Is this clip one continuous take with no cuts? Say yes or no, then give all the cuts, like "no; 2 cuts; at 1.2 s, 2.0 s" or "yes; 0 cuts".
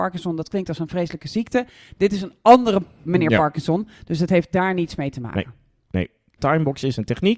no; 1 cut; at 6.4 s